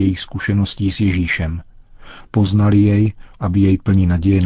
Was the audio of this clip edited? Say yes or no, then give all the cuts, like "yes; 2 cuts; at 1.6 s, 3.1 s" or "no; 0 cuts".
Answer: yes; 1 cut; at 3.3 s